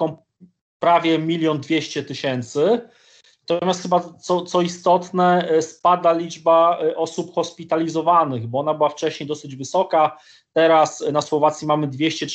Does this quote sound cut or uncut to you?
uncut